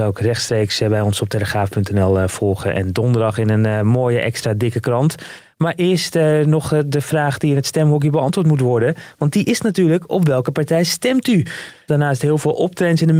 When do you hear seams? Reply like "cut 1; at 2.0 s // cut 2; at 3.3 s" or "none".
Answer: cut 1; at 11.9 s